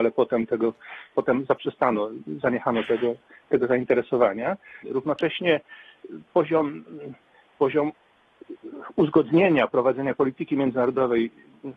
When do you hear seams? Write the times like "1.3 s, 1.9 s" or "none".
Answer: 4.8 s